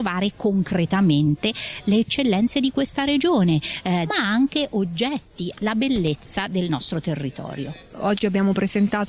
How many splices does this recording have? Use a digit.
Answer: 2